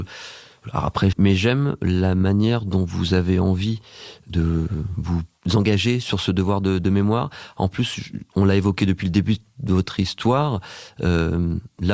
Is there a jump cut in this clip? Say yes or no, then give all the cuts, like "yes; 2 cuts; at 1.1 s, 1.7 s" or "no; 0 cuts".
yes; 1 cut; at 1.1 s